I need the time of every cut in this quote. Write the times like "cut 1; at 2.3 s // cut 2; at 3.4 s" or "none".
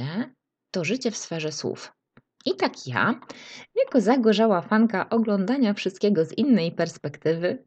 cut 1; at 2.4 s